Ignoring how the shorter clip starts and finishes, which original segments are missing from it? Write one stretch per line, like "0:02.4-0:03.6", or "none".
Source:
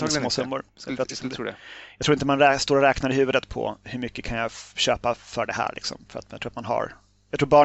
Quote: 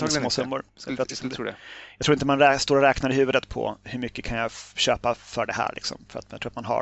none

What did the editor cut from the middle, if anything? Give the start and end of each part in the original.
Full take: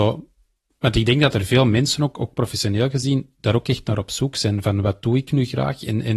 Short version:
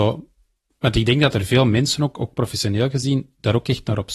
none

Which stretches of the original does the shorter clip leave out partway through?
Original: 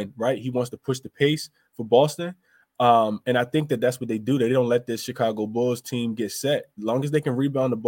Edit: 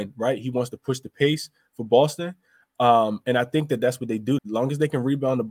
0:04.4-0:06.7

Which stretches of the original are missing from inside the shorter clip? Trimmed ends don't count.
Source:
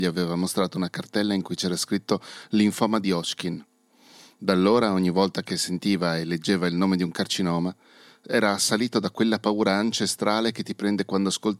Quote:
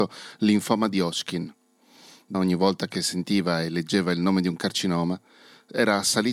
0:04.5-0:04.9

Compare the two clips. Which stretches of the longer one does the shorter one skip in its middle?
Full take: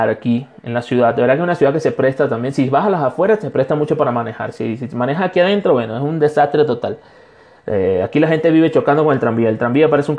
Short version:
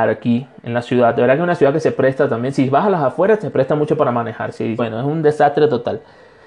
0:04.8-0:05.8

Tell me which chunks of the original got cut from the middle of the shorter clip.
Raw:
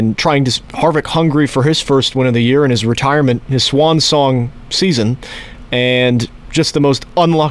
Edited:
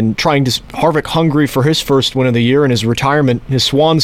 none

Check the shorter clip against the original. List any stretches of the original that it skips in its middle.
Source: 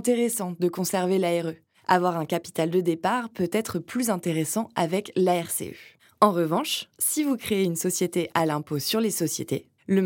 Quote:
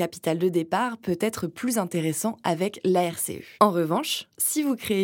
0:05.9-0:06.2

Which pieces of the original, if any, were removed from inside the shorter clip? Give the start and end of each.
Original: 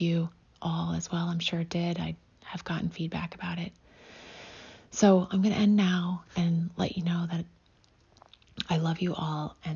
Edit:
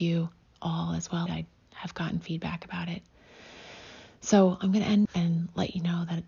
0:01.3-0:02.0
0:05.8-0:06.3

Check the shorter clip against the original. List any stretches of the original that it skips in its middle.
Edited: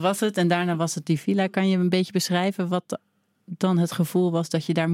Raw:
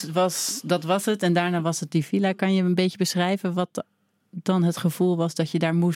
none

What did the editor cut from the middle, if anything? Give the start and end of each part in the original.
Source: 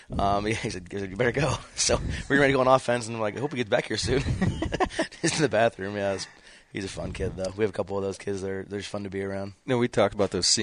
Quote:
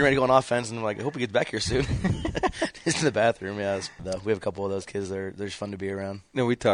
0:06.4-0:07.3

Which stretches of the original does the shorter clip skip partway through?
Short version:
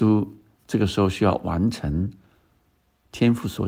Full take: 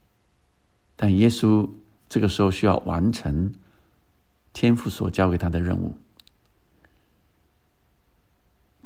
none

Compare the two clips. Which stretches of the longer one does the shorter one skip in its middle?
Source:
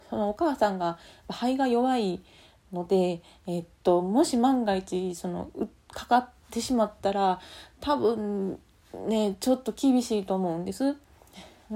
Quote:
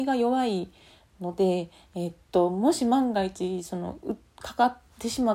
none

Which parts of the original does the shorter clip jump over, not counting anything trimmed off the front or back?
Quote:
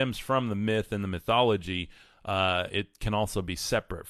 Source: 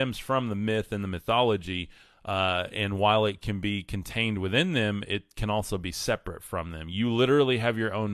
0:02.7-0:05.1

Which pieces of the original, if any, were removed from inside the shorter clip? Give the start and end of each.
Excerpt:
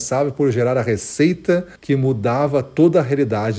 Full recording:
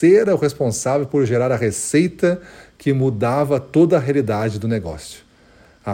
0:02.5-0:02.7

